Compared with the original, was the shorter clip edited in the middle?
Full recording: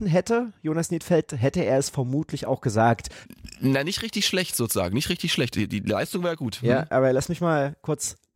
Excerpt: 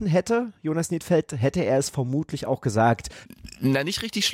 no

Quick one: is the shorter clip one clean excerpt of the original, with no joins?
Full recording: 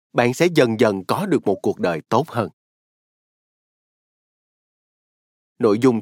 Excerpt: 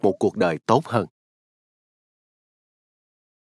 yes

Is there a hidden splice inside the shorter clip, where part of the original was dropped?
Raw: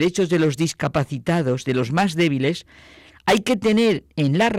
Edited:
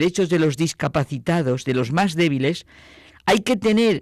no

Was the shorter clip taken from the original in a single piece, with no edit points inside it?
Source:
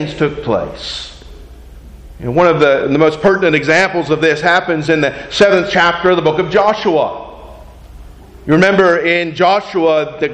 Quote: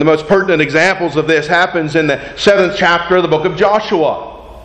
yes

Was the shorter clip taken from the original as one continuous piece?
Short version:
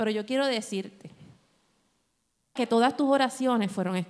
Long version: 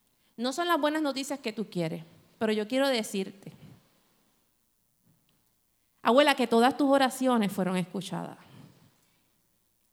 no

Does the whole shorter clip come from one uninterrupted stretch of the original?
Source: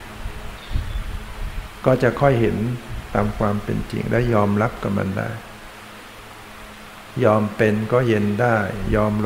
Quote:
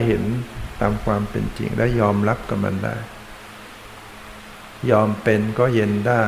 yes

